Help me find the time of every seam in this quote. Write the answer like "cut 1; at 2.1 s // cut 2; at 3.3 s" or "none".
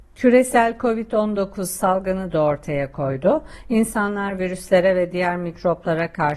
none

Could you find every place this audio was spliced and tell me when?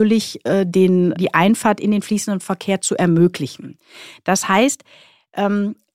cut 1; at 1.1 s

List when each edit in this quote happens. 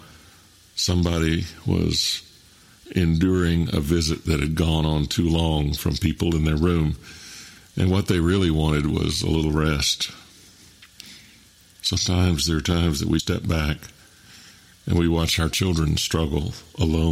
cut 1; at 11.6 s // cut 2; at 13.2 s

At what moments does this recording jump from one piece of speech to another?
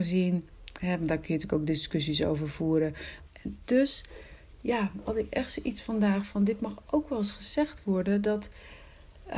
cut 1; at 3.3 s

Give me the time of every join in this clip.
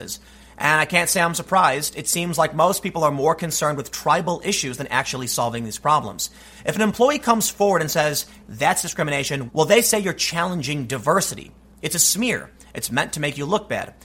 cut 1; at 8.4 s // cut 2; at 9.5 s

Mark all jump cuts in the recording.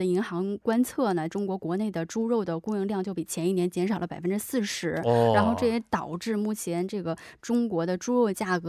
cut 1; at 1.3 s

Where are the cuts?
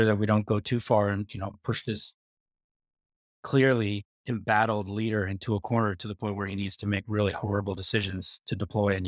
none

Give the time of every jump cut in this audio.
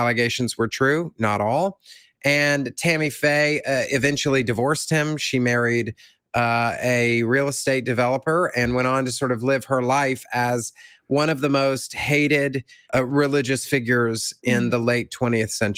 cut 1; at 12.8 s // cut 2; at 14.4 s

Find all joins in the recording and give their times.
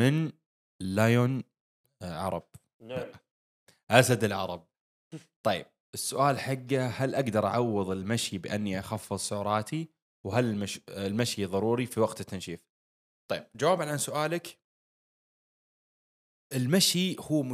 none

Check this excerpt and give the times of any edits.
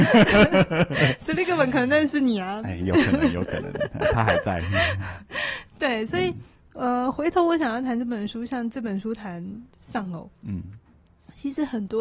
none

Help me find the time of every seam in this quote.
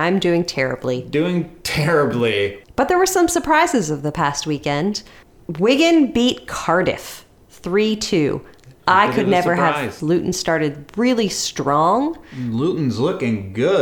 cut 1; at 10.0 s

